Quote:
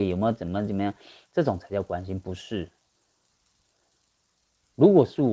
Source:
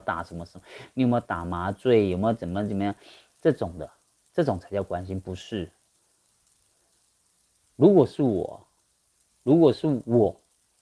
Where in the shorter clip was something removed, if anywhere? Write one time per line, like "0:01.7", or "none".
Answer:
0:01.2